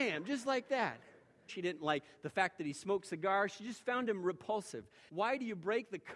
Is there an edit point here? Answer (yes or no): yes